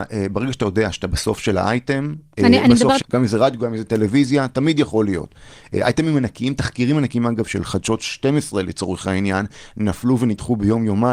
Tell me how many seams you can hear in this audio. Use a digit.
1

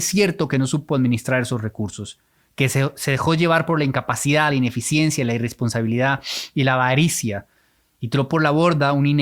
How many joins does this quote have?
0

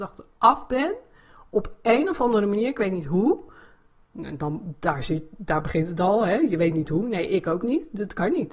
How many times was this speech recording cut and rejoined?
0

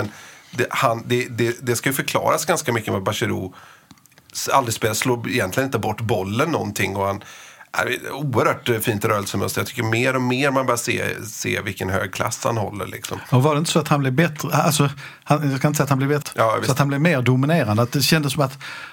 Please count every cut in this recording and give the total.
1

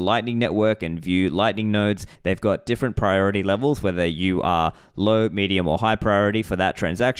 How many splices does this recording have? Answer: 1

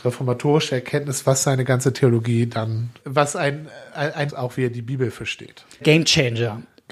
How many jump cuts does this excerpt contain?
3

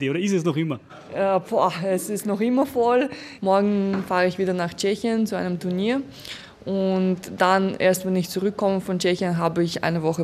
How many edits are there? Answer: 1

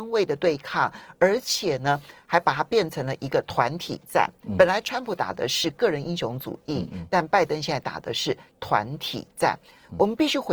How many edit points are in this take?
0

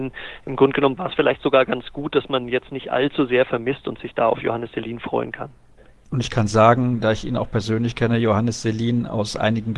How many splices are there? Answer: 1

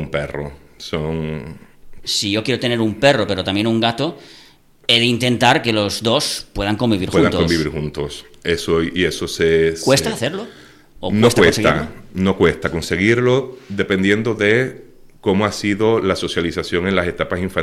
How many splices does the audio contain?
1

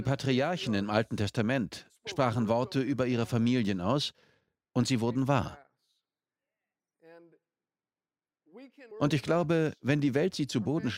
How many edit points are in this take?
1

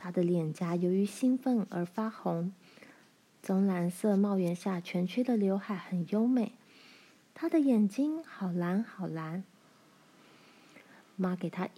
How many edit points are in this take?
0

